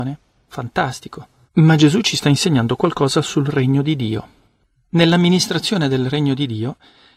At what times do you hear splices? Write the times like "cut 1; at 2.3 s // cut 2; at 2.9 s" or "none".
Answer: cut 1; at 1.5 s